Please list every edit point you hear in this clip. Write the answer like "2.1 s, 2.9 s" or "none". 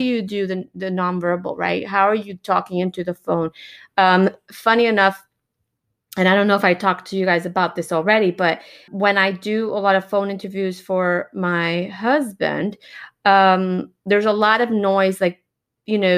8.9 s